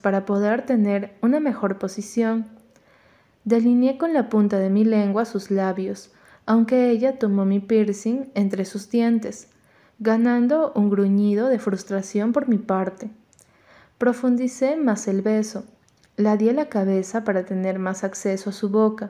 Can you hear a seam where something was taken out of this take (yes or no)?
no